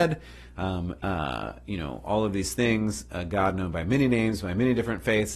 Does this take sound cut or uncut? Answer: cut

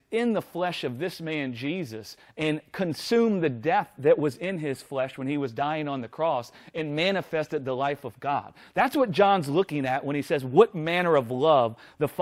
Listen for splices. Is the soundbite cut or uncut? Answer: uncut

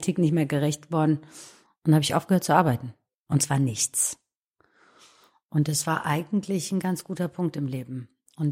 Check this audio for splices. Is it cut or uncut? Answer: cut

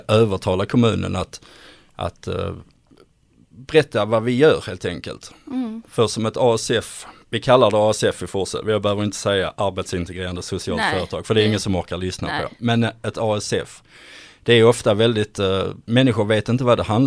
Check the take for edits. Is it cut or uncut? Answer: uncut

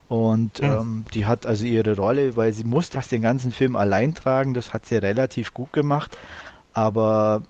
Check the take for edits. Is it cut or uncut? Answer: cut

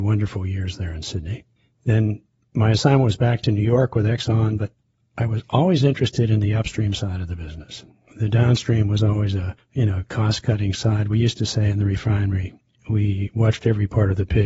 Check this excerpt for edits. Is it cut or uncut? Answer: uncut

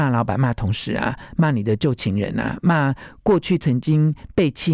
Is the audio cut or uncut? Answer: uncut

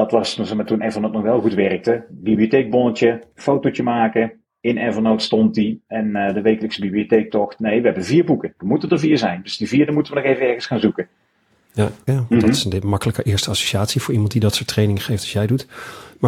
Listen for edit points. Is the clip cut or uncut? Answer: cut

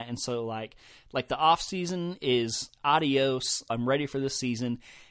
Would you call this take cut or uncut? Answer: cut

